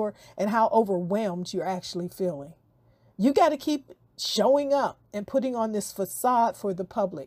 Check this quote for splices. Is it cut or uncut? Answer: uncut